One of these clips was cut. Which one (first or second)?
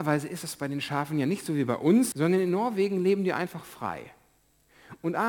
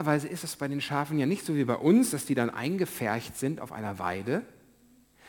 first